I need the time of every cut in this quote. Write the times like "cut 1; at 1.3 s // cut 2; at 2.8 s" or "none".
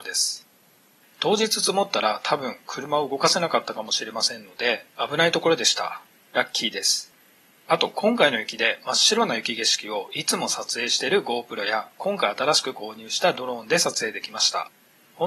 cut 1; at 1.0 s